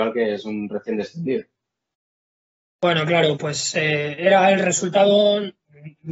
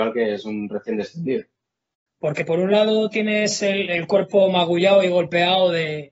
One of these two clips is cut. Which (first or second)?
second